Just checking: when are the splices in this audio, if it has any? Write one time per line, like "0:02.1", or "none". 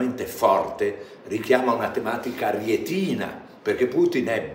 0:03.6